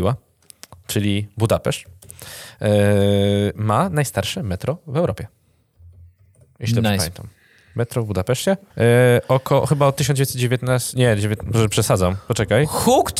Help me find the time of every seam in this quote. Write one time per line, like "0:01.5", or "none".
0:08.7